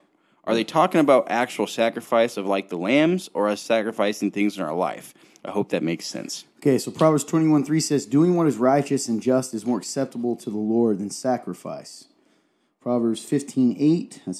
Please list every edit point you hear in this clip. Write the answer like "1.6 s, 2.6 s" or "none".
none